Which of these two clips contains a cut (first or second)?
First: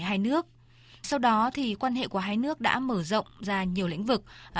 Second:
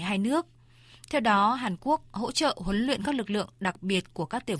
first